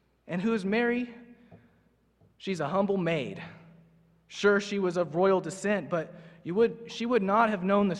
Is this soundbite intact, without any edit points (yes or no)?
yes